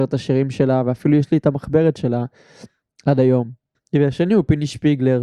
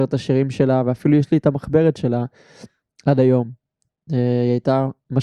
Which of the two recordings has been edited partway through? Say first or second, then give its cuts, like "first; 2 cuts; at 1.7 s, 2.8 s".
first; 1 cut; at 3.7 s